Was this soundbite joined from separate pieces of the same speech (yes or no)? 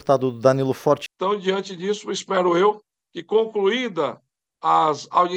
yes